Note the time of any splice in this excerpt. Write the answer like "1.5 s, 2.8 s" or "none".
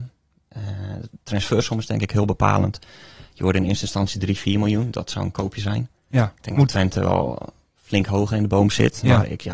none